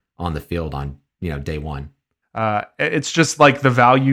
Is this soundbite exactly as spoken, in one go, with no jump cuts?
no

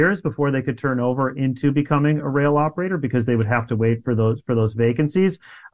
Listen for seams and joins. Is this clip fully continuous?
yes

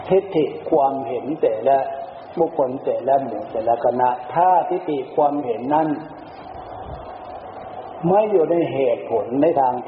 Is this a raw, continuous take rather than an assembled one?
yes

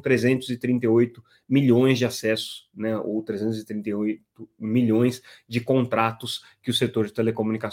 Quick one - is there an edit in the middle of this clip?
no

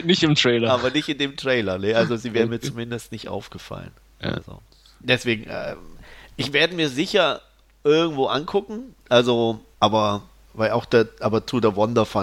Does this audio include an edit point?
no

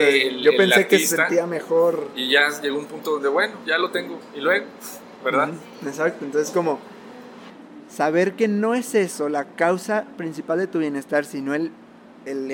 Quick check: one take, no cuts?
yes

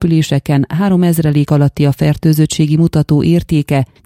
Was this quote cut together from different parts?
no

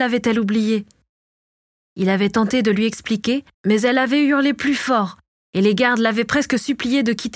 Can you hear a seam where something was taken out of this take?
yes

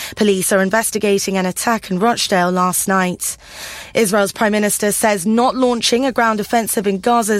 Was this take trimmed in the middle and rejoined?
no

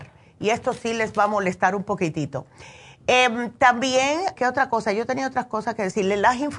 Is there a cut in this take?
yes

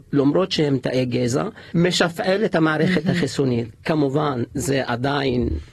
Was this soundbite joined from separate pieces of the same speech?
yes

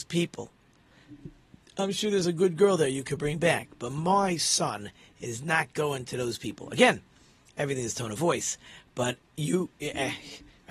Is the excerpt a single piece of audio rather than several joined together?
yes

